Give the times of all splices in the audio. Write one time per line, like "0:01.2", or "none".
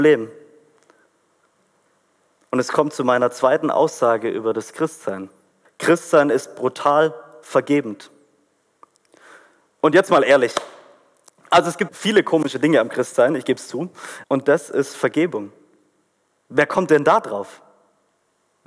0:05.6
0:11.9
0:14.2